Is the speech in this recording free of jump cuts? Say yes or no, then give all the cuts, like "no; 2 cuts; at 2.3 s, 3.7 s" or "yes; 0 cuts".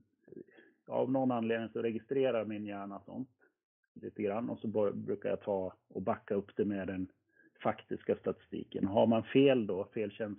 yes; 0 cuts